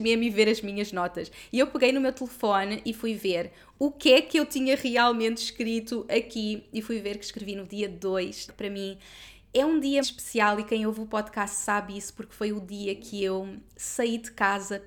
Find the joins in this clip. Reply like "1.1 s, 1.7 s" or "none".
8.5 s, 10.0 s